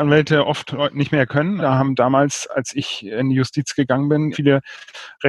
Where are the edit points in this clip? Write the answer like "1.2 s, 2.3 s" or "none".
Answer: 1.6 s, 4.3 s